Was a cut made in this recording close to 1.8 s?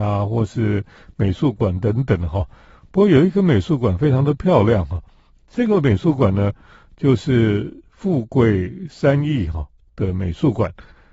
no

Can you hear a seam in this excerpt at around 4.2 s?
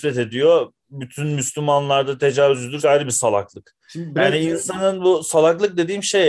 no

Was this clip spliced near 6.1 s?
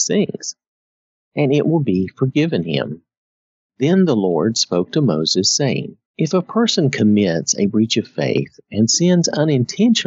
yes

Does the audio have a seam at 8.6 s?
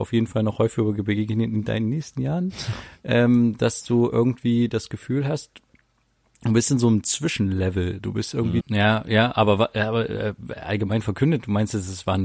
yes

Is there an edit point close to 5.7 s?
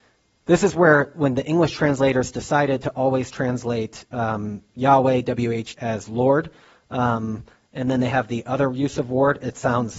yes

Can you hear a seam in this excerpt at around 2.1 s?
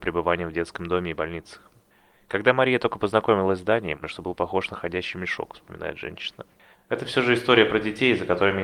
no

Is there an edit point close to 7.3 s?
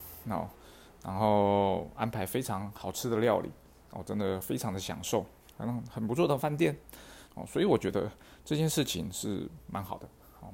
yes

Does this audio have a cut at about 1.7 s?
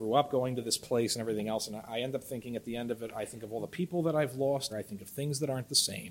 no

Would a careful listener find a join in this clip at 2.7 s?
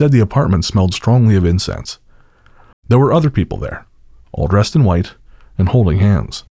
yes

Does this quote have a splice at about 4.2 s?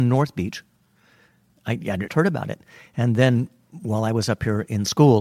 no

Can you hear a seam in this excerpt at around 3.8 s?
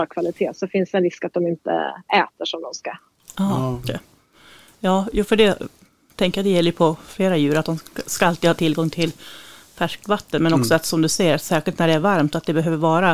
yes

